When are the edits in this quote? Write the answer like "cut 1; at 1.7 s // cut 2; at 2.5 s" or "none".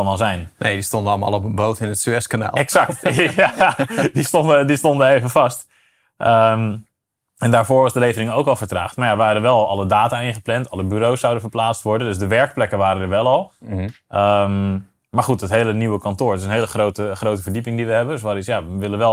none